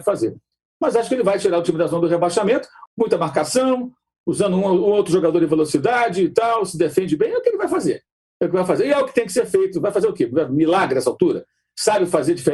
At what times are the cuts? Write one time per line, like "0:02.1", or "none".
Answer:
0:02.9